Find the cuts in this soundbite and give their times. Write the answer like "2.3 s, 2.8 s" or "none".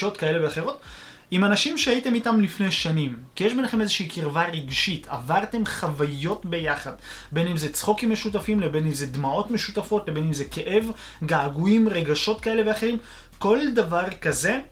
none